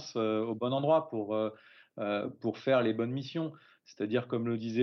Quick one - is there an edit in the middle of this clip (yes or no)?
no